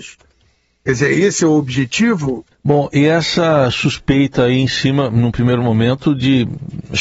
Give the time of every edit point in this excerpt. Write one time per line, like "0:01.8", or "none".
0:02.5